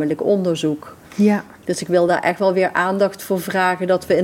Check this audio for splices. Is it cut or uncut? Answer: cut